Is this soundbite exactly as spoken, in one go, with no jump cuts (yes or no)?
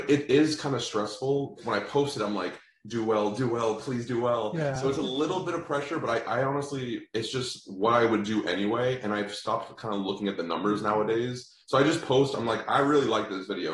yes